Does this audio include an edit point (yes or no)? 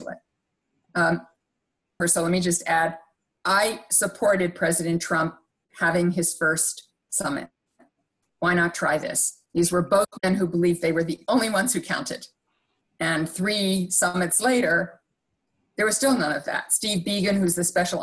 yes